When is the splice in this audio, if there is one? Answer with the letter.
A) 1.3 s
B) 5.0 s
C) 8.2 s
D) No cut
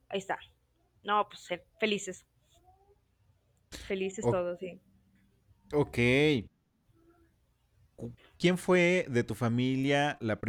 D